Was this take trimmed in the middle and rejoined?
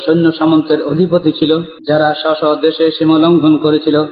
yes; 1 cut; at 1.8 s

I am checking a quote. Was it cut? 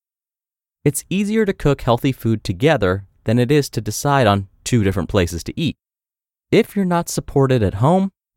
no; 0 cuts

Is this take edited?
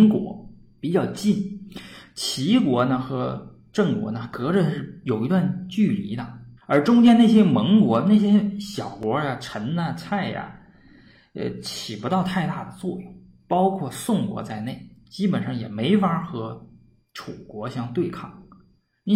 yes; 1 cut; at 6.6 s

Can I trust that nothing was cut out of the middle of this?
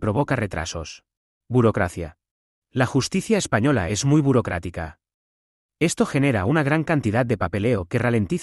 yes; 0 cuts

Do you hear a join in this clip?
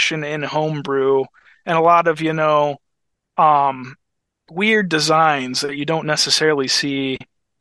no; 0 cuts

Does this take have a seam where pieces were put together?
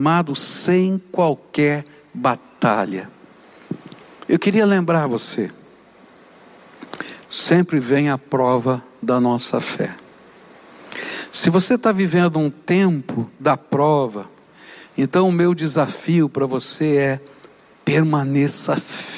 yes; 1 cut; at 7.3 s

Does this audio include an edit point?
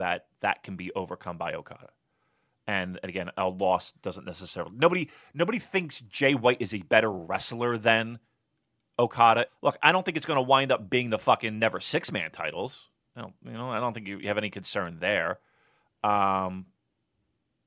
yes; 1 cut; at 9.5 s

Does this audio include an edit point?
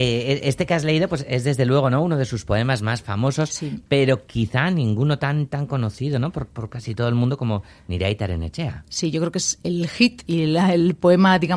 no; 0 cuts

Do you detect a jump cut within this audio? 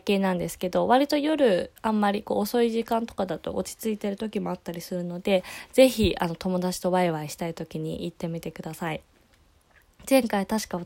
no; 0 cuts

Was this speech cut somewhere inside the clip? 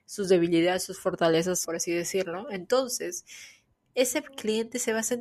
yes; 1 cut; at 1.6 s

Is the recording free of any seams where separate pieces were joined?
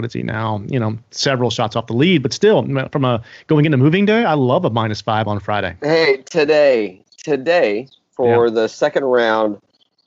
yes; 0 cuts

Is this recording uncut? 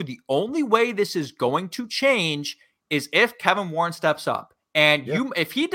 yes; 0 cuts

